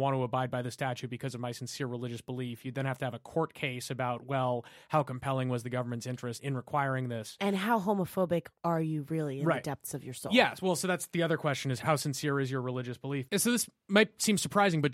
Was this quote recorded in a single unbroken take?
yes; 0 cuts

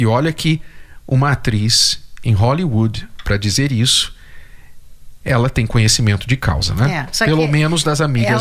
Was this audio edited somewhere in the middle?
no; 0 cuts

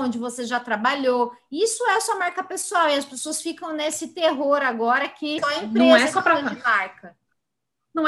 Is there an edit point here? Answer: yes; 1 cut; at 5.4 s

